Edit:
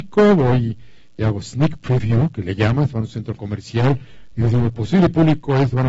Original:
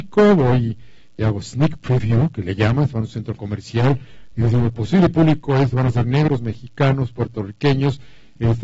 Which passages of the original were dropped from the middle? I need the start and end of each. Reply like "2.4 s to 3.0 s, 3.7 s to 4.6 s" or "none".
none